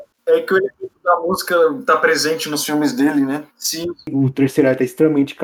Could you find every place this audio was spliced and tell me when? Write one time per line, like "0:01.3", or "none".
0:03.5